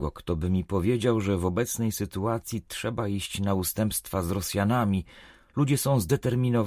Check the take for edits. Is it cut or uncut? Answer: uncut